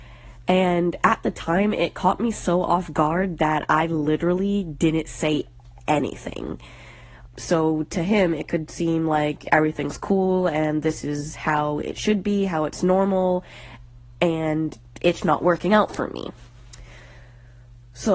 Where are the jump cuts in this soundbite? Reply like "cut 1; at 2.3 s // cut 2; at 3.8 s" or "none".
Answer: cut 1; at 7.3 s // cut 2; at 15.2 s